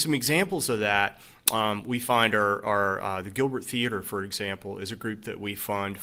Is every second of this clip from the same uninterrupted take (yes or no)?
yes